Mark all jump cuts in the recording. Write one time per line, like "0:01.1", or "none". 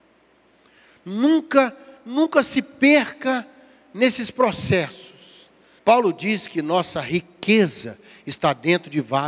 0:05.8

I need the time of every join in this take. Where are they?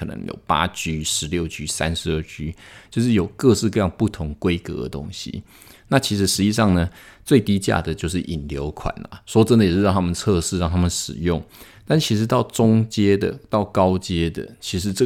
none

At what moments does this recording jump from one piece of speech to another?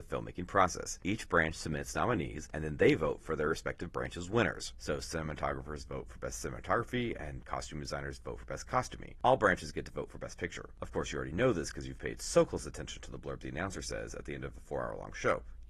0:10.8

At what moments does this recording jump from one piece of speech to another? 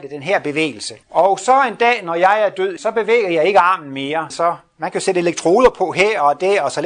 0:01.0
0:02.8
0:04.3

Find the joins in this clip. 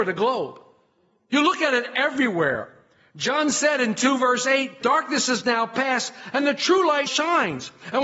0:04.8
0:07.1

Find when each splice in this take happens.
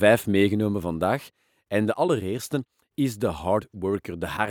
none

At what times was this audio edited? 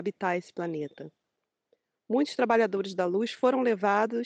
0:02.0

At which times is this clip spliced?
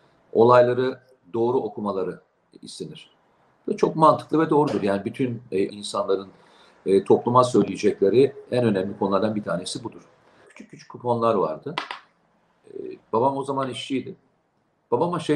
0:05.7
0:10.4
0:13.0

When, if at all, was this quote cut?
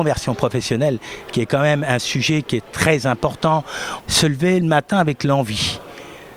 0:04.0

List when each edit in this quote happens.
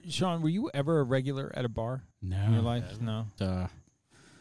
0:02.1
0:03.4

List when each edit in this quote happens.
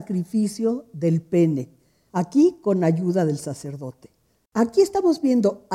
0:04.4

